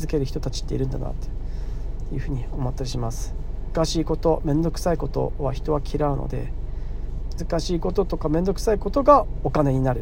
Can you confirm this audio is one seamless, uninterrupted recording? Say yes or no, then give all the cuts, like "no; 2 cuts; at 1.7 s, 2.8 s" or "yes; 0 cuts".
no; 2 cuts; at 3.7 s, 7.4 s